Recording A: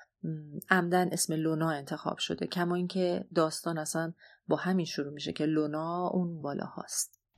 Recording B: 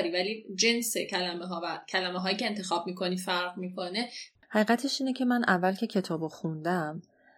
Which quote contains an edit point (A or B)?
A